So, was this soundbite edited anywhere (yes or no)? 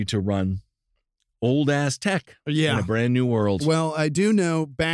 no